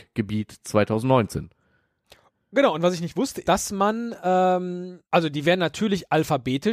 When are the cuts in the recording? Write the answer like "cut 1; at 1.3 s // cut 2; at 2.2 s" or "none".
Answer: cut 1; at 3.4 s // cut 2; at 5.1 s